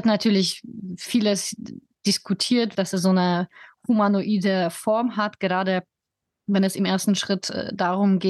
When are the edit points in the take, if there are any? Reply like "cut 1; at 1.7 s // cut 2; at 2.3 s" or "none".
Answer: cut 1; at 2.7 s